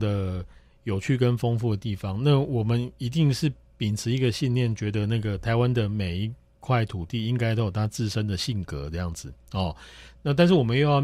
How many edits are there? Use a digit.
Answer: 0